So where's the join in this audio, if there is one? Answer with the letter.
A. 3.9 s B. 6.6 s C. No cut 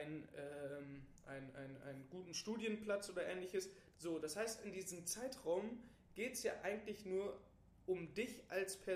A